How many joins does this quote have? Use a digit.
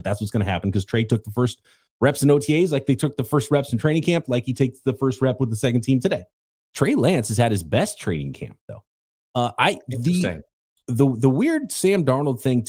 1